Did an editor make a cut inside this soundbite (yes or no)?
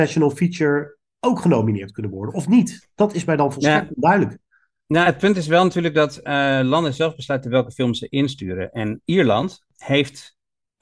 no